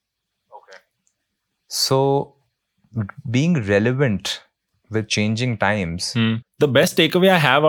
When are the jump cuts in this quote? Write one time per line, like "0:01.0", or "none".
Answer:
0:06.4